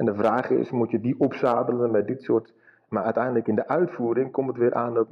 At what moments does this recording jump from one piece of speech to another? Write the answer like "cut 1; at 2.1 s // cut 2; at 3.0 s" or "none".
cut 1; at 2.9 s